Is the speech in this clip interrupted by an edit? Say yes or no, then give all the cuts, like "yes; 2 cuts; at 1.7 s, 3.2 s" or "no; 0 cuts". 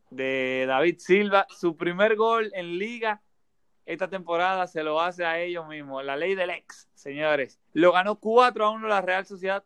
yes; 1 cut; at 7.7 s